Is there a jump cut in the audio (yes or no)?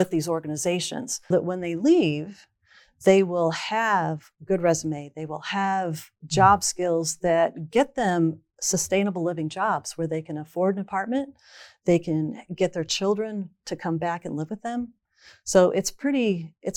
yes